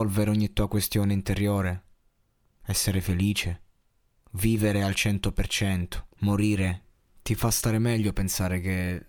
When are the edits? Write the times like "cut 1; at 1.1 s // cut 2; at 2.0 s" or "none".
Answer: cut 1; at 4.2 s // cut 2; at 6.1 s